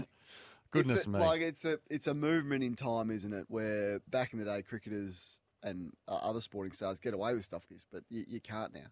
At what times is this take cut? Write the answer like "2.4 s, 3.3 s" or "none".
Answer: 4.1 s, 7.6 s